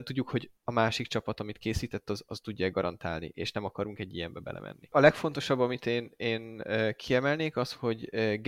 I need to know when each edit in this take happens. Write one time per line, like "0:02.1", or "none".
0:04.9